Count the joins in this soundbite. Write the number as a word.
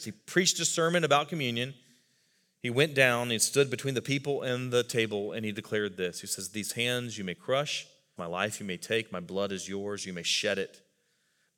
one